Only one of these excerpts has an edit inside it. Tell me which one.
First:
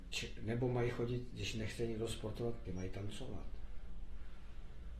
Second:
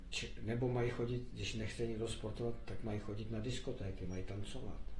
first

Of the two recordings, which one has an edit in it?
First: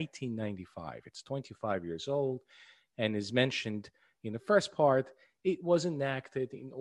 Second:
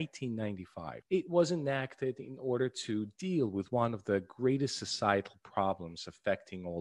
second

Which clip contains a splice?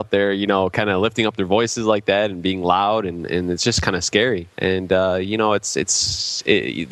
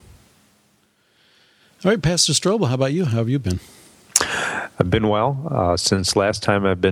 first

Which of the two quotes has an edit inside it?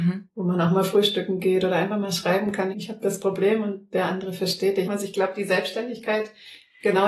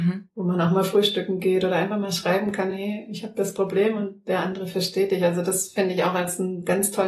first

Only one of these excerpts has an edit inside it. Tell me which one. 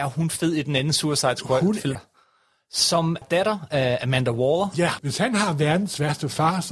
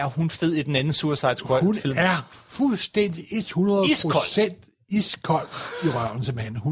first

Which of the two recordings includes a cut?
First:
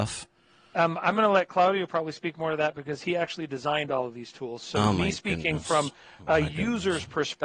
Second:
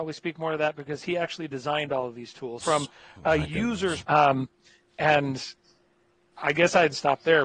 second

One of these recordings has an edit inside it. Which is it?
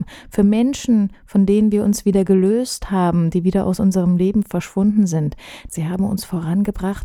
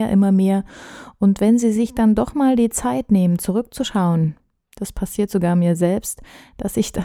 first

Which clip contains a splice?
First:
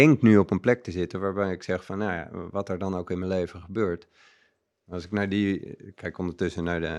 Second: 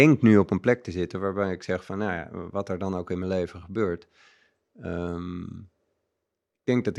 first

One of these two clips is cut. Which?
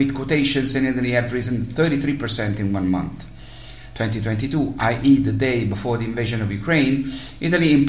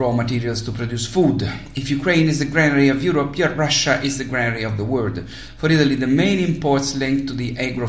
first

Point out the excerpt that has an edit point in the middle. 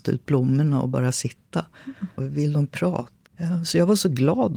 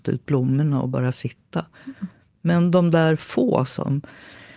first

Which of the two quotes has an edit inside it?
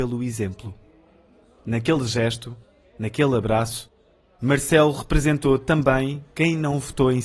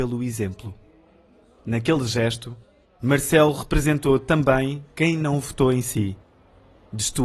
second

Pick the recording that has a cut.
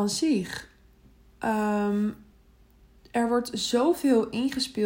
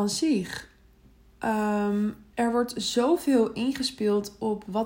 second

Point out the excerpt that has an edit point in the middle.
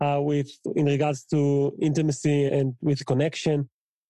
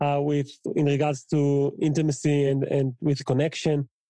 first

